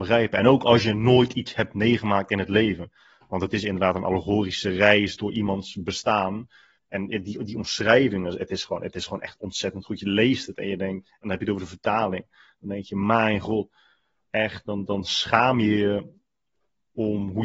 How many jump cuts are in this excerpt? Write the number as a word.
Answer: one